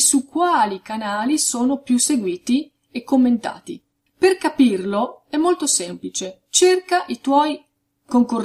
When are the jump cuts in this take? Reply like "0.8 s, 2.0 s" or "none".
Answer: 4.1 s